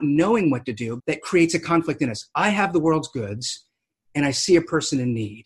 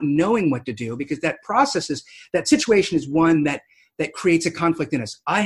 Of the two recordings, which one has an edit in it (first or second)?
first